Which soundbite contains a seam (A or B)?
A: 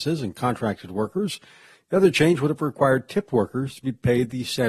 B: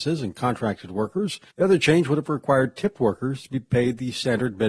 B